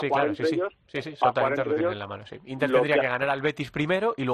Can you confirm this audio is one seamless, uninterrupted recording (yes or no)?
yes